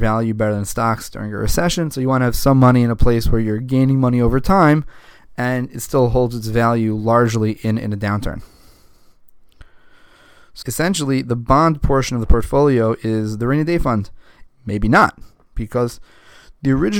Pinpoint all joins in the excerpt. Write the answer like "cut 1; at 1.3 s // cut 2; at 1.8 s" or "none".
cut 1; at 10.6 s // cut 2; at 14.5 s